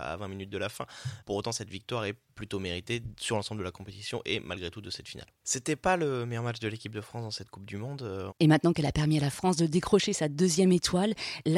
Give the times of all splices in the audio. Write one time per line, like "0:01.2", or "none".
0:05.4
0:08.3